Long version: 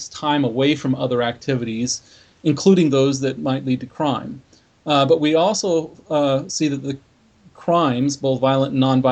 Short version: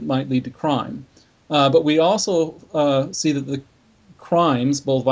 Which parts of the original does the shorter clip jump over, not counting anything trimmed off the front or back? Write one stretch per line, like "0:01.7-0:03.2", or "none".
none